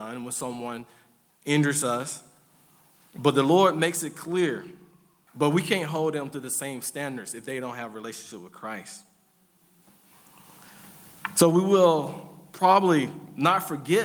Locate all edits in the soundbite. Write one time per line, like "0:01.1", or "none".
0:05.3